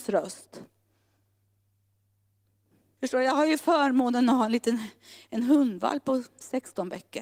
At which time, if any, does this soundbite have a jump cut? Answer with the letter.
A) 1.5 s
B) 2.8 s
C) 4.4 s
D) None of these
D